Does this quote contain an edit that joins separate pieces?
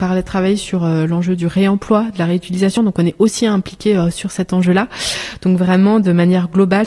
no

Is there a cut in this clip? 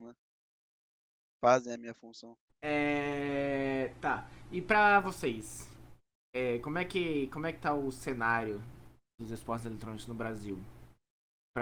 no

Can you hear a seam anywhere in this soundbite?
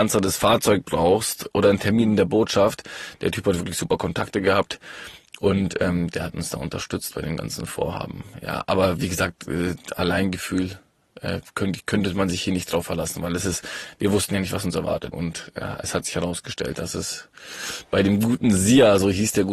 yes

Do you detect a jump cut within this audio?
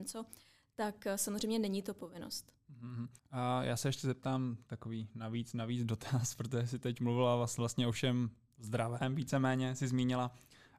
yes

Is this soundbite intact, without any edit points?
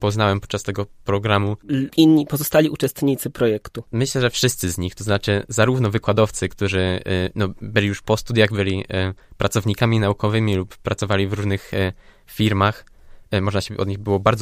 no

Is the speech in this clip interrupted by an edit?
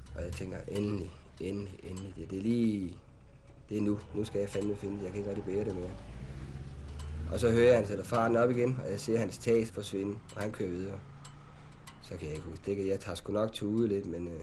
yes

